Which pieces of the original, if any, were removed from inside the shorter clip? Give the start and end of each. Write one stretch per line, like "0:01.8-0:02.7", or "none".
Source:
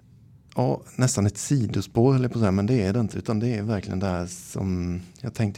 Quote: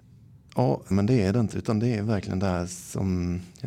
0:00.9-0:02.5

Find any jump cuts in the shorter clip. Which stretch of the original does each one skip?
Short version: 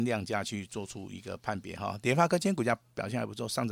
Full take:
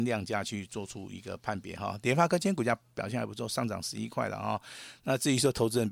none

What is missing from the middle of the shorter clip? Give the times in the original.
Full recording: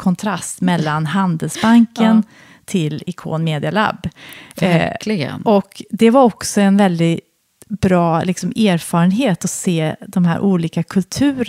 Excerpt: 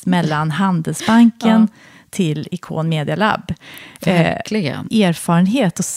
0:05.4-0:08.5

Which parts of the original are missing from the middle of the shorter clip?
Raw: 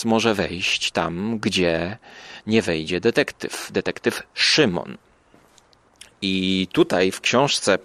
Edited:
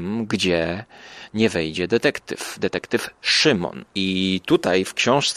0:05.0-0:06.1

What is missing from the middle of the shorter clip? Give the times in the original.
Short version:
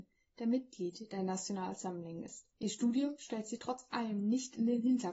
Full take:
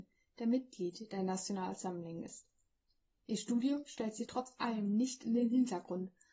0:02.5-0:03.2

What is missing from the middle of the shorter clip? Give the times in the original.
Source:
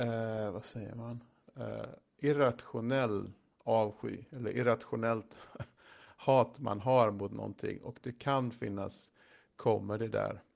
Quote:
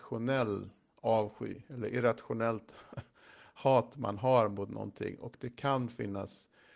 none

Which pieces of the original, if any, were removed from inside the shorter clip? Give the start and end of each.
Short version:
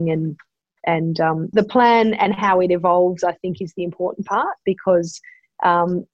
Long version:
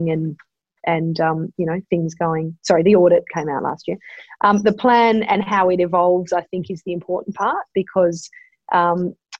0:01.5-0:04.6

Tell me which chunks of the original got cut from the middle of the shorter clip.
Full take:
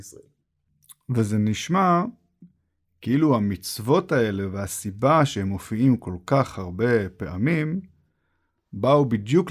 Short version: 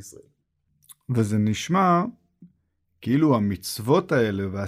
none

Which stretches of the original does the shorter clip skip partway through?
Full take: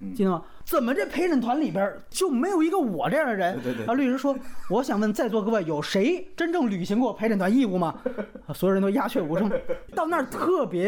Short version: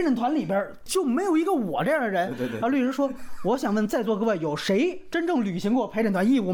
none

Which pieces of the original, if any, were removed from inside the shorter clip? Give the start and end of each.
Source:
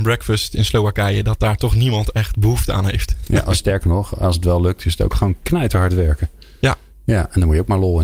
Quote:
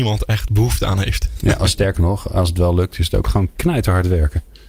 none

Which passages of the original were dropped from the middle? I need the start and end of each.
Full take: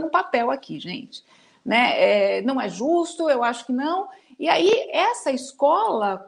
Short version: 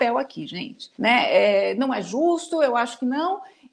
0:01.3-0:01.6

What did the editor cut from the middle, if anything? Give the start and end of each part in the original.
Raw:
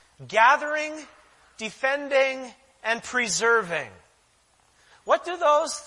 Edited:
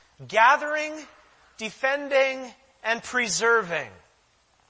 none

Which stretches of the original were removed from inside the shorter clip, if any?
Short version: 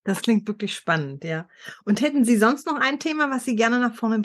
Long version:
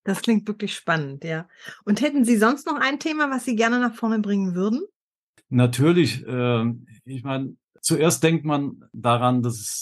none

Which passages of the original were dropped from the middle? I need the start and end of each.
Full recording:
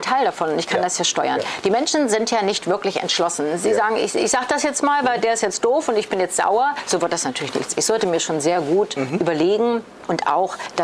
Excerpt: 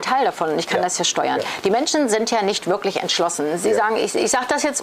none

